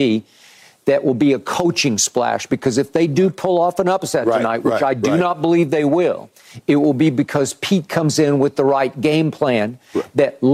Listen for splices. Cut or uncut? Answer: uncut